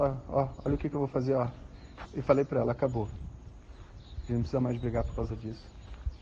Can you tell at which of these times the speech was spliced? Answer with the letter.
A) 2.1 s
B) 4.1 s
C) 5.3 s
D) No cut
A